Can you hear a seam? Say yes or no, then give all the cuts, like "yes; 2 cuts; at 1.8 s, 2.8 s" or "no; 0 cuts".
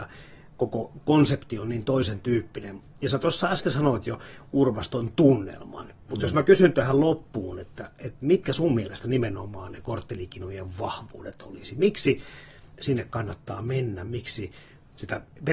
no; 0 cuts